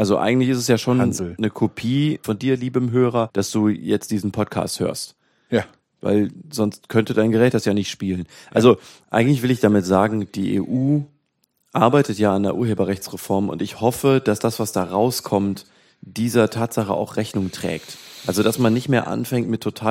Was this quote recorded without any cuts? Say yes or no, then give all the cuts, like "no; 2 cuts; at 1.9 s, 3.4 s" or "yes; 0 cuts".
yes; 0 cuts